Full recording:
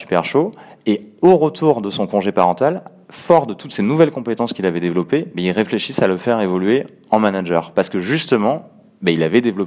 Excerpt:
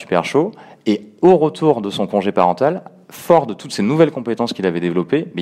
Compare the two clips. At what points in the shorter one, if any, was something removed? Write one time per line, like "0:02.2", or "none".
none